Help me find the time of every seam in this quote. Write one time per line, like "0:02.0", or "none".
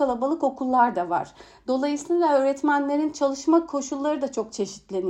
none